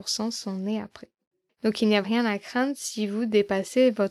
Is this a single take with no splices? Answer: no; 1 cut; at 2.0 s

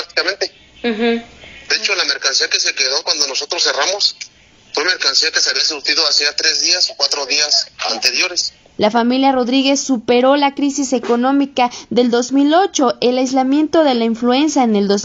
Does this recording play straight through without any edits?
no; 2 cuts; at 1.7 s, 8.8 s

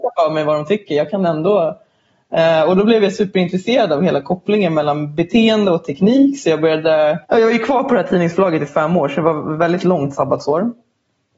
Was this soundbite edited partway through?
yes; 1 cut; at 7.2 s

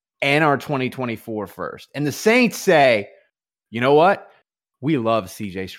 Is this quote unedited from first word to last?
yes; 0 cuts

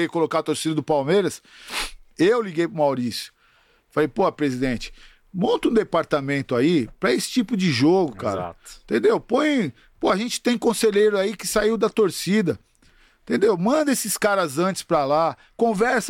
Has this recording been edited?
no; 0 cuts

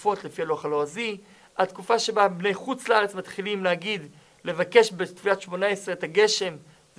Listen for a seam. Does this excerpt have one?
no; 0 cuts

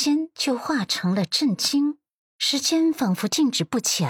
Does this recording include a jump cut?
yes; 1 cut; at 2.3 s

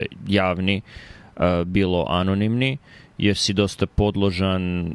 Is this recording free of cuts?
yes; 0 cuts

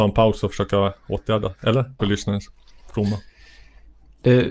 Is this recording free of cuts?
no; 1 cut; at 2.0 s

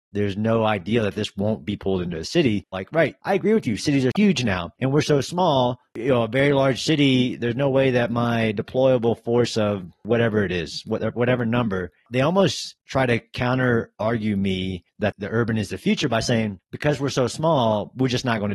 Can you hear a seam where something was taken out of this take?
yes; 1 cut; at 2.7 s

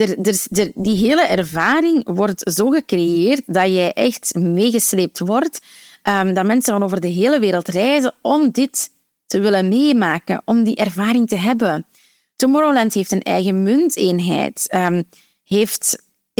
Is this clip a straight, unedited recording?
yes; 0 cuts

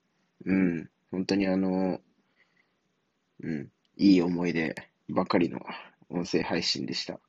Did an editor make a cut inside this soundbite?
no; 0 cuts

